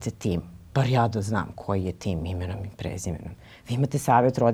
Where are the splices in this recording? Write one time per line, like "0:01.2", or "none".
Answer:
none